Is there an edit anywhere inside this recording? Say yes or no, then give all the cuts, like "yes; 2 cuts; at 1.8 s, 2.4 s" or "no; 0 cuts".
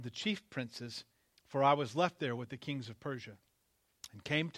yes; 1 cut; at 1.3 s